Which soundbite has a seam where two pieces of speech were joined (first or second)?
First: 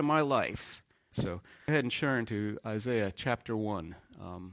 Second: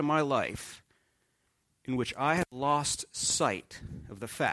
first